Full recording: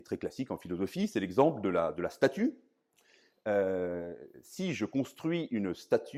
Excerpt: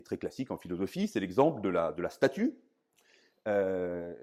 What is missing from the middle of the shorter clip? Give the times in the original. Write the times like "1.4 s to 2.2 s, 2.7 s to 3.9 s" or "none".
none